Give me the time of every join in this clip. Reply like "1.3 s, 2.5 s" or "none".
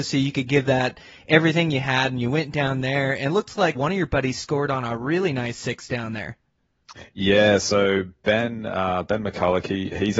3.7 s